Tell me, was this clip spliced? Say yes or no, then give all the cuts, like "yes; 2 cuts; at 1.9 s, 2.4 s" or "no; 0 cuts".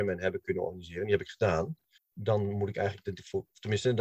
yes; 1 cut; at 2.0 s